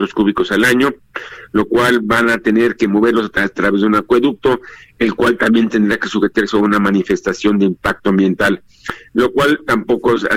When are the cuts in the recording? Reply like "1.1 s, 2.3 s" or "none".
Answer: none